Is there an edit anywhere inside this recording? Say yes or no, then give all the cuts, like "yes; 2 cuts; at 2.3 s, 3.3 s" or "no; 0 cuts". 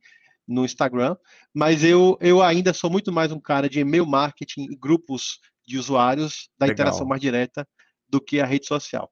no; 0 cuts